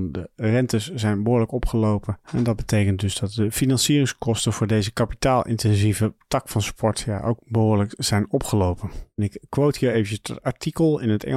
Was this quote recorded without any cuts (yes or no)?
yes